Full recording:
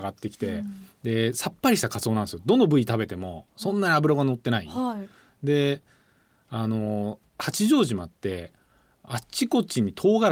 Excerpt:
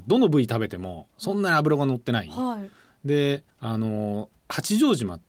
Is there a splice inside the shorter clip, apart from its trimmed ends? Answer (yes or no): yes